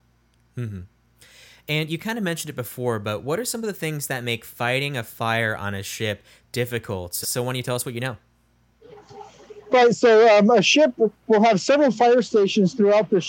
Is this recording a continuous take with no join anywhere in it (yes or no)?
no